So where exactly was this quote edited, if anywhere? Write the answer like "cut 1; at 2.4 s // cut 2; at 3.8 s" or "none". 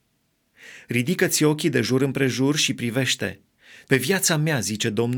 cut 1; at 3.9 s